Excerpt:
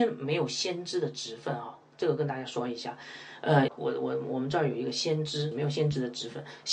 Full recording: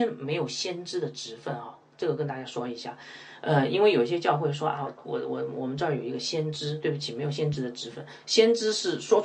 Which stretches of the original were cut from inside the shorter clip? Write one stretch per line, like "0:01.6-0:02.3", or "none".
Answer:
0:03.7-0:04.9
0:06.8-0:07.1